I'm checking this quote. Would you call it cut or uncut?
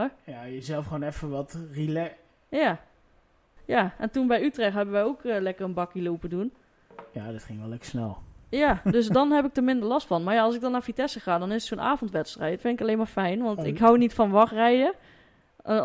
cut